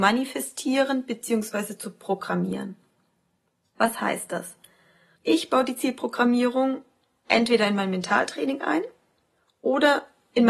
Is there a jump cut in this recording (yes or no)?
yes